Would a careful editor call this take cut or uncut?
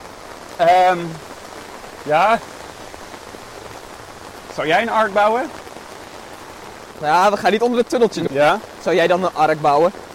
cut